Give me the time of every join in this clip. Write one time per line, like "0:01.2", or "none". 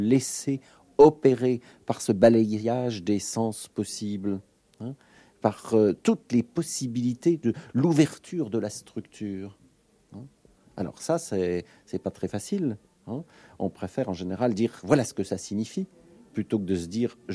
none